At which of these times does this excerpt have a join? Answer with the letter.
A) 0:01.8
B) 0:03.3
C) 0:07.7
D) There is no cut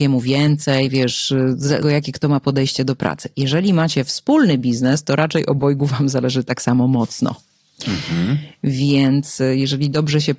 A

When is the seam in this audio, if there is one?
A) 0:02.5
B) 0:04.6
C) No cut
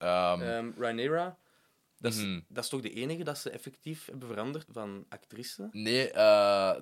B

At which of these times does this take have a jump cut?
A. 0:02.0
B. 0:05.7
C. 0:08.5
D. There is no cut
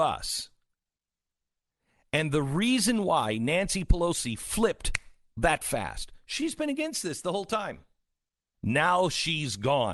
C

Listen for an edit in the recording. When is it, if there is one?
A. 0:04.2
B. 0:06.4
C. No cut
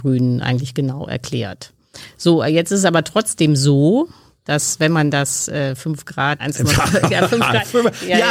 B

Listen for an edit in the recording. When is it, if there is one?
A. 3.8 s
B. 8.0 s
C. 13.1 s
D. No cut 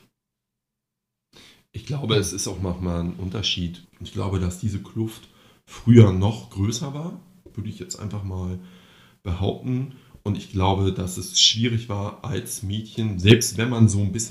A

